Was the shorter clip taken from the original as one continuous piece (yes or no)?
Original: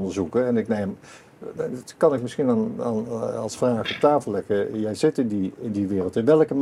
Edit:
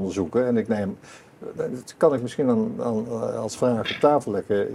yes